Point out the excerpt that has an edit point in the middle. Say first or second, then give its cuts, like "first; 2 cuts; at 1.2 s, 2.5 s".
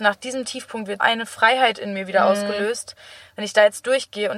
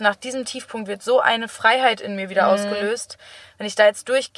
first; 1 cut; at 1.0 s